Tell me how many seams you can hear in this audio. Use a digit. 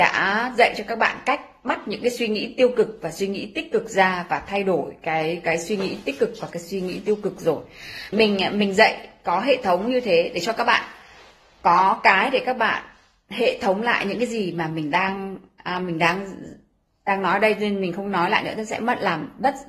1